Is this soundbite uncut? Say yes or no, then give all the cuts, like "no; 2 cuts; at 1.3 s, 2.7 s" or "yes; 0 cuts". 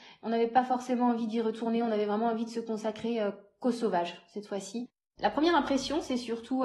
yes; 0 cuts